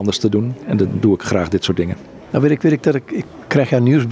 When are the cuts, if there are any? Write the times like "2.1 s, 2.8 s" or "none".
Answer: none